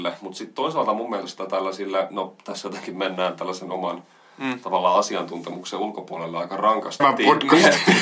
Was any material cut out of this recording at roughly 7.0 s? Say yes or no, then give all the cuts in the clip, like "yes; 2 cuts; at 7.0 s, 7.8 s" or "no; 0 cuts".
yes; 1 cut; at 7.0 s